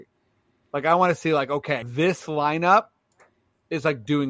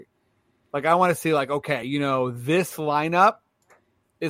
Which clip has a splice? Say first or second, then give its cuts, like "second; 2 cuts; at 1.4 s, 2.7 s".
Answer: first; 1 cut; at 1.8 s